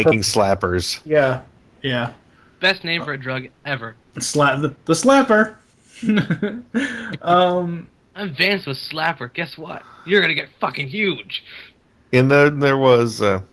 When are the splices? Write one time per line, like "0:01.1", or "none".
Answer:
none

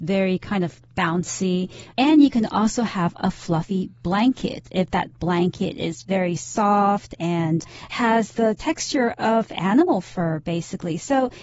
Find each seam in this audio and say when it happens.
none

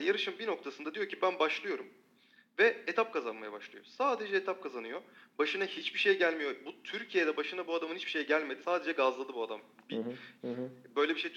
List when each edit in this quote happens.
0:08.6
0:10.4

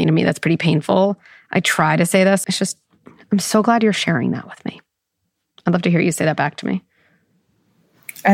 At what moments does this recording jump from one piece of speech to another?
0:02.4

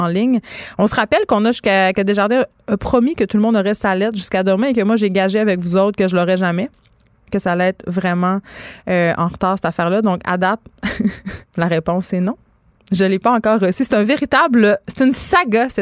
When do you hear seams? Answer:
0:11.4

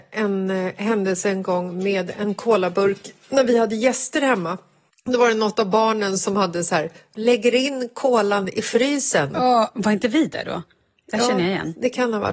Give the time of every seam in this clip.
none

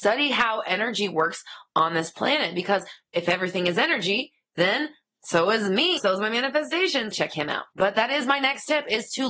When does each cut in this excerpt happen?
0:06.0
0:07.1

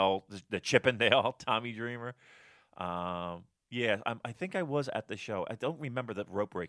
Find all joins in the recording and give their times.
none

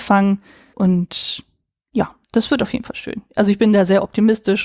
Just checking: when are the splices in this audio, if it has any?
0:02.2

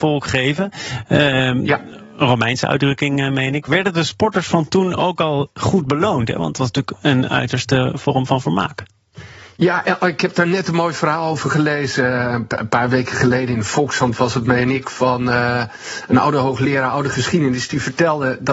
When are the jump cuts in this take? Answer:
none

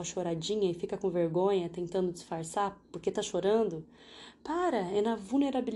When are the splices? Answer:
none

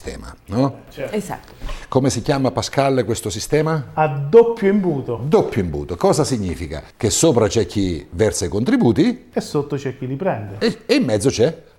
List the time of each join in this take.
0:06.9

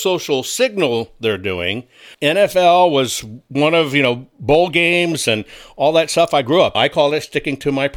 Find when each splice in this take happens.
0:02.1
0:06.7

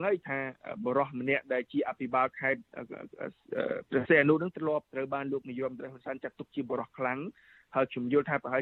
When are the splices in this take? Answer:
0:04.9

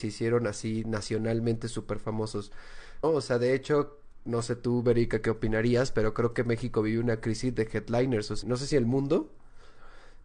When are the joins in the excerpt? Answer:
0:03.0
0:08.4

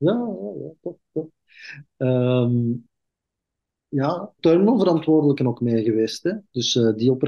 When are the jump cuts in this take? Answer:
0:04.4

